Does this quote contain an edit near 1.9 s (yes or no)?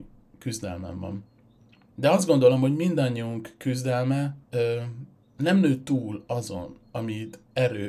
yes